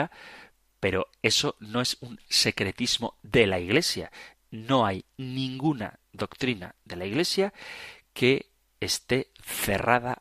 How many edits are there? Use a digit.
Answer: 1